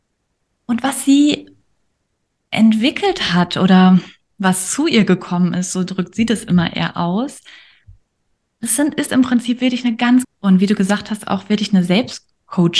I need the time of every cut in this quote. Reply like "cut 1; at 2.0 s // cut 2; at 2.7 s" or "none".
cut 1; at 10.2 s

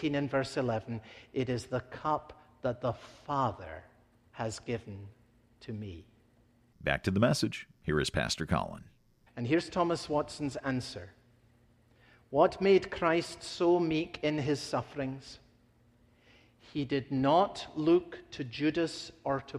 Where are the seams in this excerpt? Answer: cut 1; at 6.7 s // cut 2; at 9.3 s

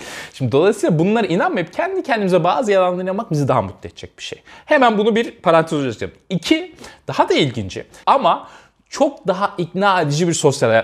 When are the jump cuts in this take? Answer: cut 1; at 8.0 s

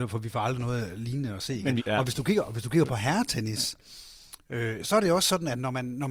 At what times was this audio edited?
cut 1; at 1.8 s // cut 2; at 4.8 s

